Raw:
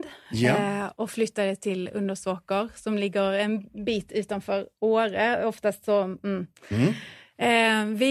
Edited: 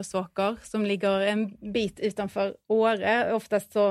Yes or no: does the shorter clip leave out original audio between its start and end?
no